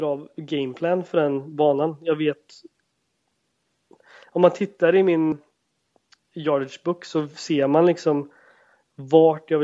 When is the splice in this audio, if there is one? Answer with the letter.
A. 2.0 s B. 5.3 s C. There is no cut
B